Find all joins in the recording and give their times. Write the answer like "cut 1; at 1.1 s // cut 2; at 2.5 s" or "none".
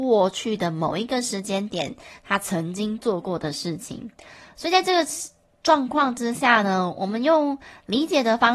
none